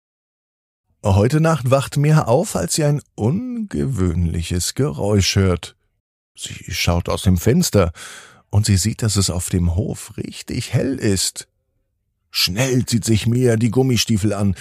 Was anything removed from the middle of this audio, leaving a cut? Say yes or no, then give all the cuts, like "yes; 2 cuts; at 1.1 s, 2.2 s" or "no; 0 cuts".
no; 0 cuts